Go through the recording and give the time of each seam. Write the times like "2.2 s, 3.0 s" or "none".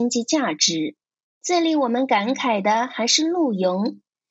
1.2 s